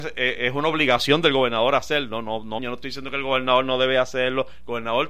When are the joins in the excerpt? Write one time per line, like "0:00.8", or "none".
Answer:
0:02.6